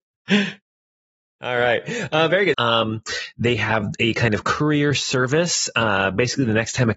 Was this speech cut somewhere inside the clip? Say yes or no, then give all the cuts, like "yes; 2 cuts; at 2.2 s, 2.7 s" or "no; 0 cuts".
yes; 1 cut; at 2.5 s